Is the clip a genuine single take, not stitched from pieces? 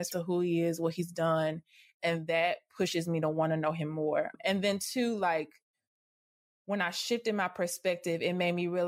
yes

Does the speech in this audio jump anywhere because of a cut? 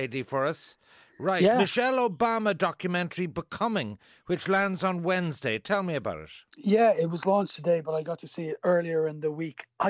no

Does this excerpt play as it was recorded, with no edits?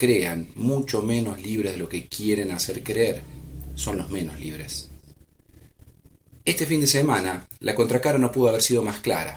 yes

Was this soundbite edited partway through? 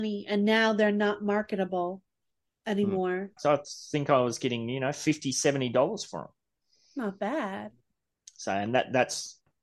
yes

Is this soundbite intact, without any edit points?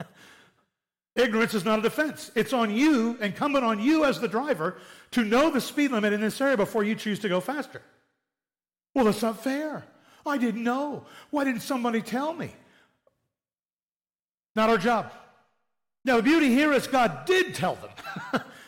yes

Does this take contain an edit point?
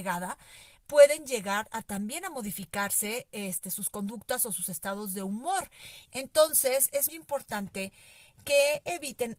yes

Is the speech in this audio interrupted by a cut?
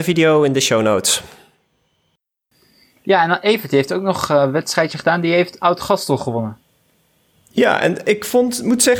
no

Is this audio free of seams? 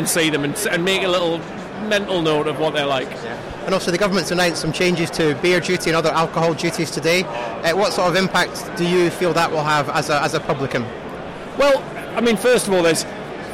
yes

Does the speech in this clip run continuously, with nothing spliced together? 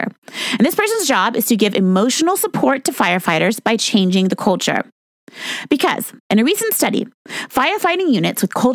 no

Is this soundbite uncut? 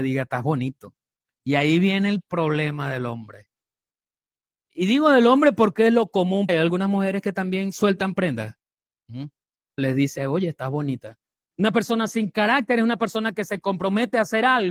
no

